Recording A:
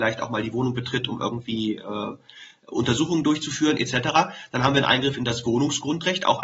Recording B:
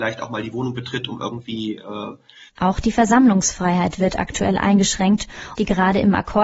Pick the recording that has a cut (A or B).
B